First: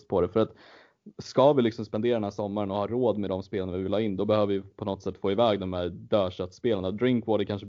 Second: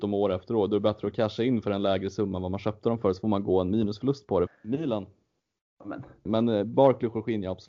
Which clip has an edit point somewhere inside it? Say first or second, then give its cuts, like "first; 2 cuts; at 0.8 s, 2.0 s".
second; 2 cuts; at 4.5 s, 6.3 s